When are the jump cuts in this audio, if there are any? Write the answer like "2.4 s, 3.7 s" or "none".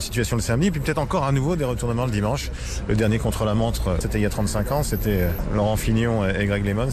4.0 s